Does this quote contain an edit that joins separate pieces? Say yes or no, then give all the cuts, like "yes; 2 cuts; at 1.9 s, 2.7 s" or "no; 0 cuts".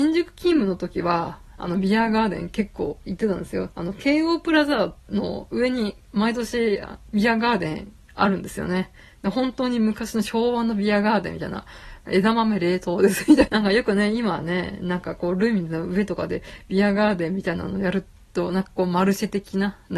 yes; 2 cuts; at 3.7 s, 13.5 s